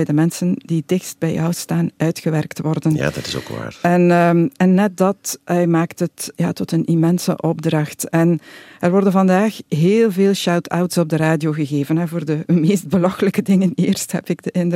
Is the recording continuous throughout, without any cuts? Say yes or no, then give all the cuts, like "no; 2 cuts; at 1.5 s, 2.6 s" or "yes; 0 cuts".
no; 1 cut; at 6.3 s